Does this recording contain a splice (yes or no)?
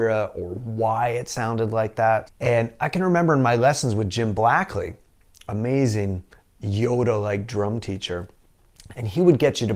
yes